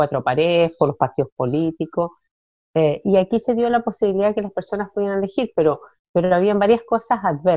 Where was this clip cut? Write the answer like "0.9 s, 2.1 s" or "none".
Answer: none